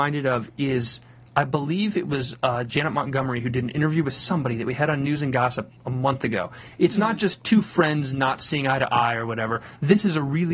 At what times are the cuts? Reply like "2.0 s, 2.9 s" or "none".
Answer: 6.8 s